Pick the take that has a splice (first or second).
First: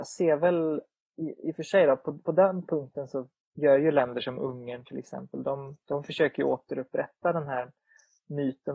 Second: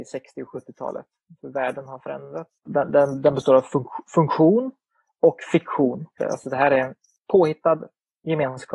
second